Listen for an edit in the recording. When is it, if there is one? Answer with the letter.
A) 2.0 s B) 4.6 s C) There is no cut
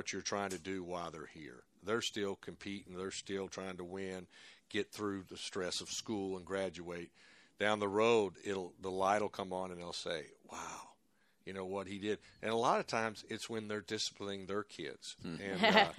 C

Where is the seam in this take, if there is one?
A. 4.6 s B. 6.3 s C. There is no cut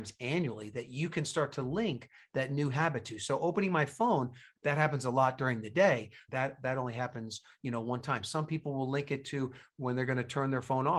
B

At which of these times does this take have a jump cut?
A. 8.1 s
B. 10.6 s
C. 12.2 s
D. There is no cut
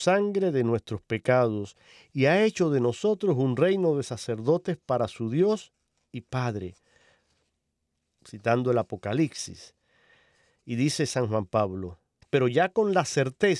C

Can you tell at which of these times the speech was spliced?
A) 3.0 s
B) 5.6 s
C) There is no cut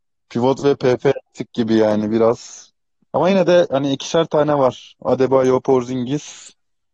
C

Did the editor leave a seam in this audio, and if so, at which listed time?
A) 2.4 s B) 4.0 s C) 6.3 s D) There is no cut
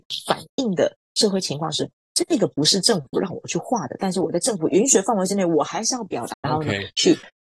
C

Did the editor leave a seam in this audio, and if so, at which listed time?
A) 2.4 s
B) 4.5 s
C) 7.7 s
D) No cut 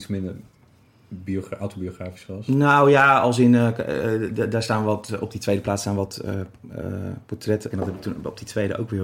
C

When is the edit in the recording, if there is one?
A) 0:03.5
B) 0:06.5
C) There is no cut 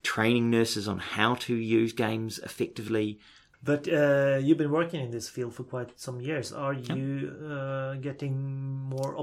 A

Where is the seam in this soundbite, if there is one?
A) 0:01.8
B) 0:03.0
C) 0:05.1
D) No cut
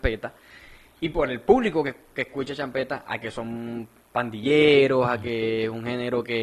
D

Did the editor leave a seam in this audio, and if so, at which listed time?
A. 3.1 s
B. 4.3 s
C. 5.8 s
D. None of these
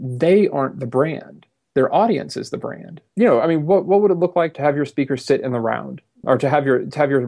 A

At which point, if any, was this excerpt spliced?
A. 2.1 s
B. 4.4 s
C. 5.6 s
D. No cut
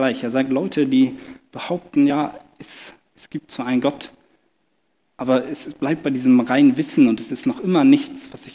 D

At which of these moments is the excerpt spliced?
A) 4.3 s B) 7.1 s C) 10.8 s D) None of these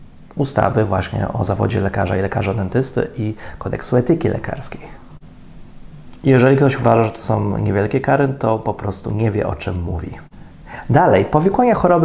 D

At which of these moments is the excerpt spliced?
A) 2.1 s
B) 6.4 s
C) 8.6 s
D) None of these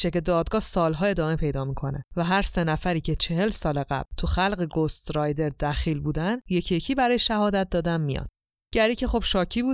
D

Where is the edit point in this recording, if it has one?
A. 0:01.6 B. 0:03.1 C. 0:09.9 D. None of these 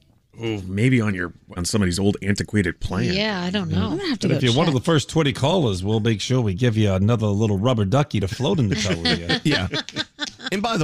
A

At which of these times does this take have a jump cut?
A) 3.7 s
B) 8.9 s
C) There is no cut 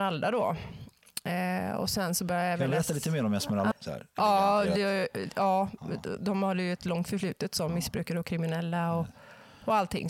A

